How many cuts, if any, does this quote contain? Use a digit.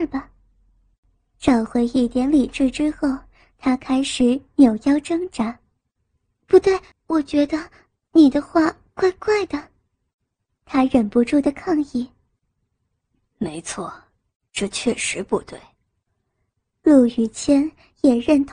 1